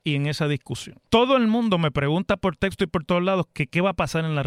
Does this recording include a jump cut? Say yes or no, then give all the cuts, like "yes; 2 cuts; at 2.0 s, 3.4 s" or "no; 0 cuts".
yes; 1 cut; at 1.1 s